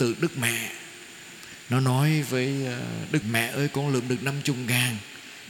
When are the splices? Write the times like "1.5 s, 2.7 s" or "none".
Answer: 3.2 s